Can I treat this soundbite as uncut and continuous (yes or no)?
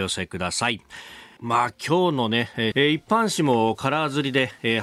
no